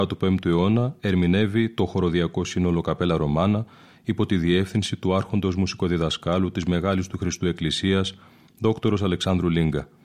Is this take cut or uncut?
uncut